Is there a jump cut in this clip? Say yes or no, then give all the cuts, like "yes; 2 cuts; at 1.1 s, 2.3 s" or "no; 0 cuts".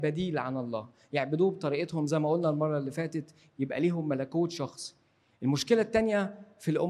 no; 0 cuts